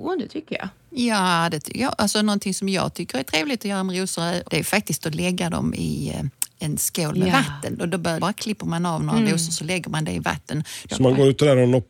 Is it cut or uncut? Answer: cut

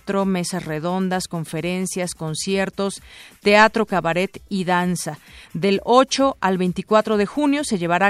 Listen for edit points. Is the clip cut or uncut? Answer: uncut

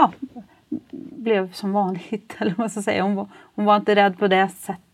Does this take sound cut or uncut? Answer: uncut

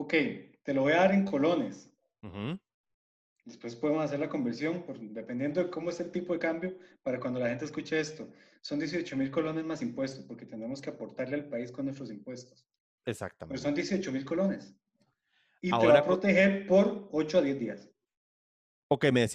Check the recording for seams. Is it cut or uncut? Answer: uncut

